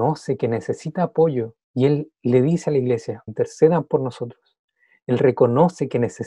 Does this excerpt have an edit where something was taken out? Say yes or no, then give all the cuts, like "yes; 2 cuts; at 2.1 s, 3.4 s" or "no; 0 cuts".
yes; 2 cuts; at 1.6 s, 3.3 s